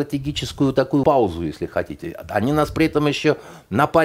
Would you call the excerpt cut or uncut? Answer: cut